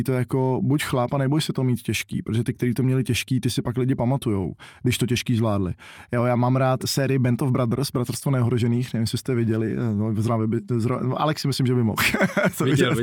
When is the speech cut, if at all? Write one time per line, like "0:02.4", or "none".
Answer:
none